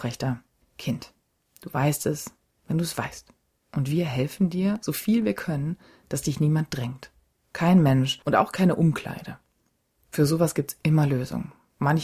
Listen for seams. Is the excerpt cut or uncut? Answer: uncut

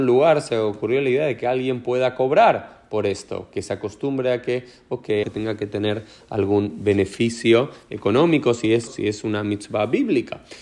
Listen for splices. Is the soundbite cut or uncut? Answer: cut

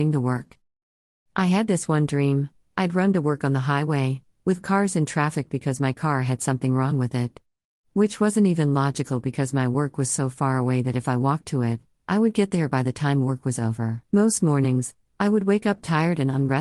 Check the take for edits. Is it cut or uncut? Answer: cut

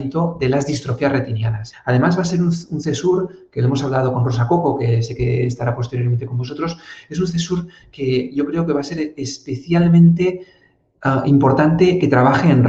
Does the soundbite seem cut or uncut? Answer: cut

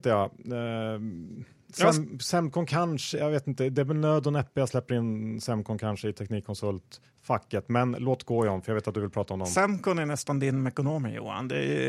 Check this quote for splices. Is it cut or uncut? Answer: uncut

